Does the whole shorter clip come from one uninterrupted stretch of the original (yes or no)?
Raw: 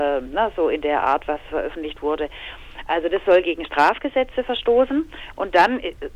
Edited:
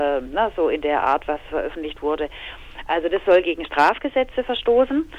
yes